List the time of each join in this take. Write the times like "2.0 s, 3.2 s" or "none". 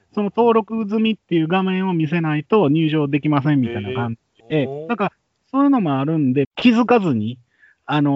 4.4 s, 6.4 s